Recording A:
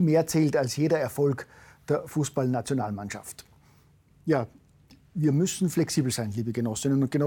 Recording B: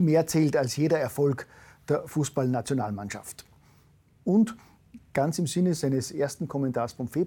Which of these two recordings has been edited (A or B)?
A